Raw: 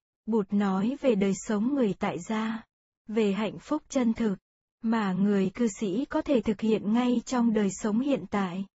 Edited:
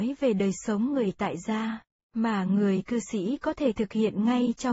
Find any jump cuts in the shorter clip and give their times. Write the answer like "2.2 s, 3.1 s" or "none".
2.0 s